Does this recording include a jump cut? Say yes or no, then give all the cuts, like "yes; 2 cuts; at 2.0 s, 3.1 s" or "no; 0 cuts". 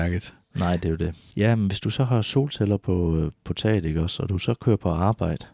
yes; 1 cut; at 1.3 s